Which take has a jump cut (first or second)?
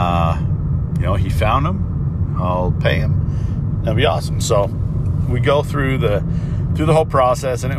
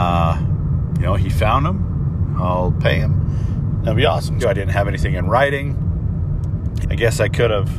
second